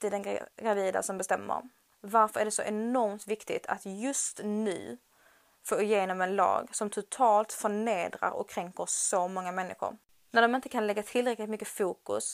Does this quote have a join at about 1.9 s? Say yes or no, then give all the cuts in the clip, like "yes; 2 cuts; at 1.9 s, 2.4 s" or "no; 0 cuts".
yes; 2 cuts; at 1.9 s, 10.3 s